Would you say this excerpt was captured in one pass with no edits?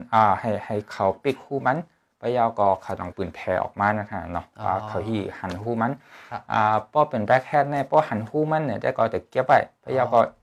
no; 1 cut; at 3.1 s

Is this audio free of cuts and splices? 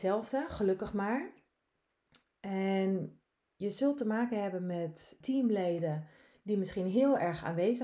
no; 1 cut; at 5.2 s

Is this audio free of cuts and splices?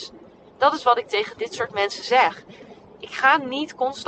yes; 0 cuts

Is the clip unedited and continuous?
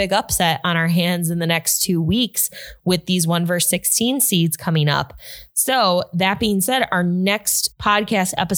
yes; 0 cuts

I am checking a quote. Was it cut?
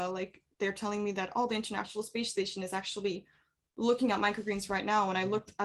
no; 0 cuts

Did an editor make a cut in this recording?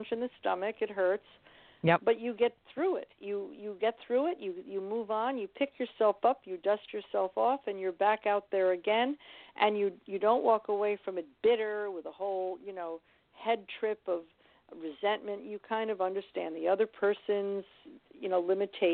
no; 0 cuts

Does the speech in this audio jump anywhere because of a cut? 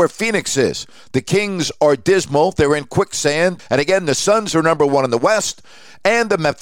yes; 1 cut; at 3.6 s

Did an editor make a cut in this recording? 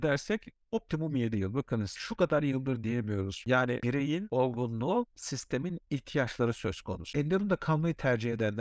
yes; 1 cut; at 3.4 s

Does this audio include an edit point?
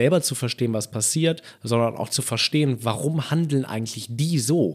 no; 0 cuts

